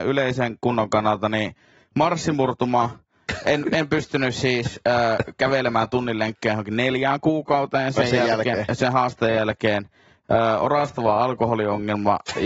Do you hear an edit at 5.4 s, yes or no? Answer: no